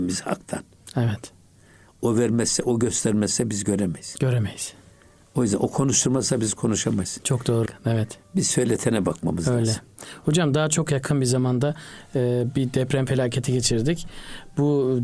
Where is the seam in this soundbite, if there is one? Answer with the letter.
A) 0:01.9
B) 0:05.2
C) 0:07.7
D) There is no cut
C